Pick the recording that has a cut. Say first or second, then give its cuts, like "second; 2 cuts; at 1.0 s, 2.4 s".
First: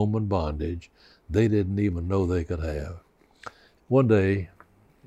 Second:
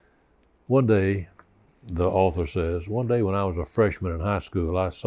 first; 1 cut; at 3.8 s